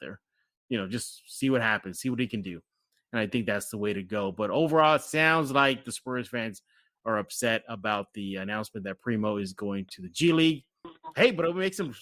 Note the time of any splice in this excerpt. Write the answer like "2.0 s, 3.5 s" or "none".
none